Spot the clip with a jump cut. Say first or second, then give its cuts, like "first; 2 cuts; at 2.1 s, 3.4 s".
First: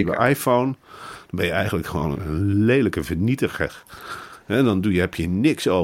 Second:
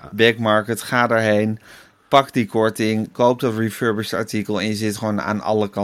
first; 1 cut; at 2.2 s